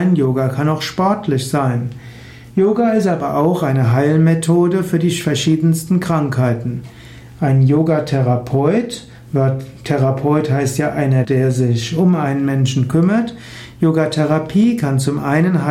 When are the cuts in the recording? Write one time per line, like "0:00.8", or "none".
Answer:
0:11.2